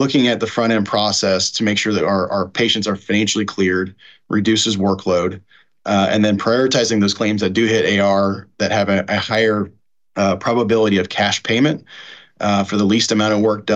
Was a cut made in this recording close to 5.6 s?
no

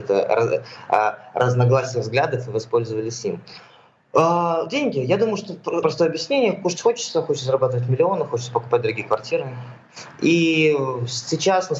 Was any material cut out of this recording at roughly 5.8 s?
yes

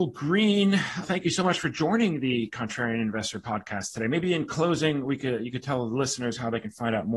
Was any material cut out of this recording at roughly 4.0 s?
no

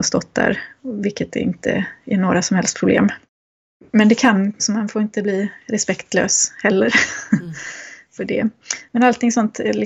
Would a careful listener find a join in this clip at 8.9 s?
no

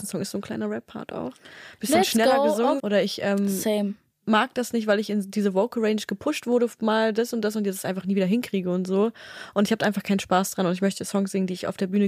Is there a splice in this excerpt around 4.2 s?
no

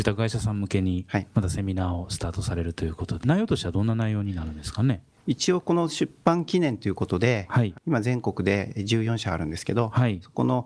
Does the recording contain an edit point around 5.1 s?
no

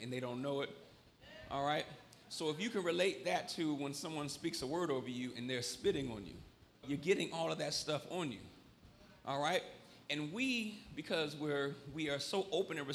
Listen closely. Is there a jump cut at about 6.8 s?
yes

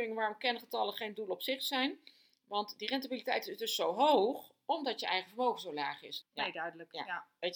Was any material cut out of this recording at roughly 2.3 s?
no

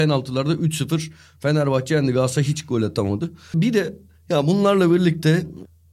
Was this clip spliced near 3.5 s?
yes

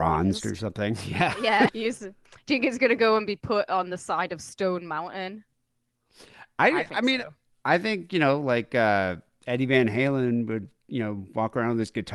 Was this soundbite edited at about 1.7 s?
yes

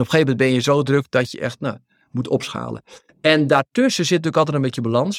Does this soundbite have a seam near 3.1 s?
yes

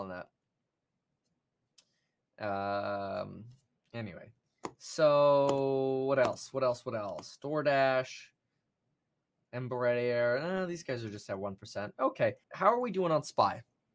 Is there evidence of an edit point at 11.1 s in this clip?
no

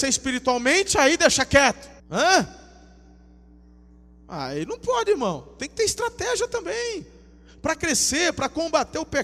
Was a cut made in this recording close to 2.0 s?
yes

